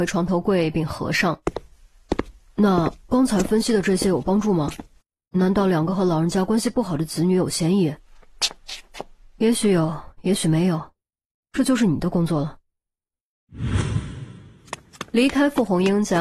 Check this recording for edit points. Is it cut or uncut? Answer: uncut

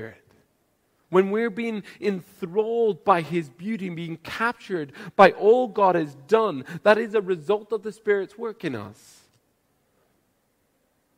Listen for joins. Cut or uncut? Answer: uncut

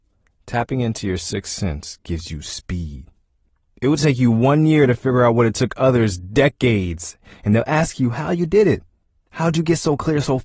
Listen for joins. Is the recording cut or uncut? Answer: uncut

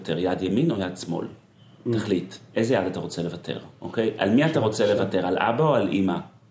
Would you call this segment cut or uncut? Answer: uncut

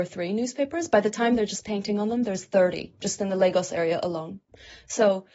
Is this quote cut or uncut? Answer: uncut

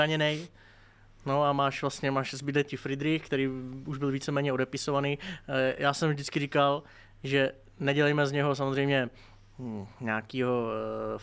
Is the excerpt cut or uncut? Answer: uncut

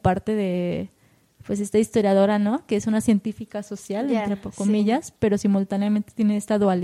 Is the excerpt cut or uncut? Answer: uncut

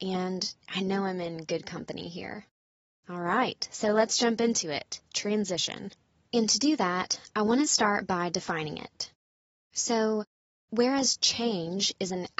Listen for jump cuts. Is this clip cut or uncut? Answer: uncut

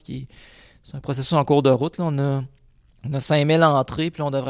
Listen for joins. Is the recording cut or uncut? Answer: uncut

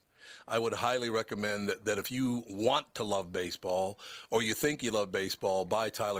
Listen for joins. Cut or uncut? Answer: uncut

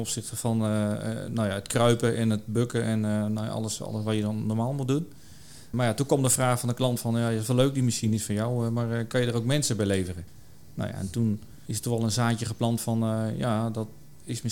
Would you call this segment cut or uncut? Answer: uncut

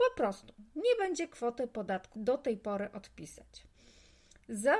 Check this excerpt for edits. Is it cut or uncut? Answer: cut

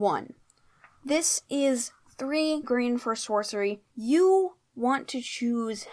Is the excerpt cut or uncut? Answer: cut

